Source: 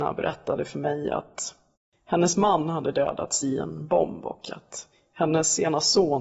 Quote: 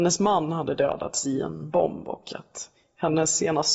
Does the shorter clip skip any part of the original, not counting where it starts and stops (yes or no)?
no